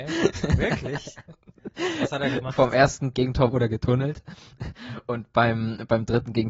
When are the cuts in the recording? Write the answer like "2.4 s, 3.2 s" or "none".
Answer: 3.1 s, 4.6 s